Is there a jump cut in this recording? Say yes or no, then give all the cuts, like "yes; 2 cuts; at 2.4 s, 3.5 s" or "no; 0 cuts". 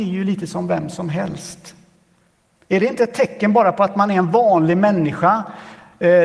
no; 0 cuts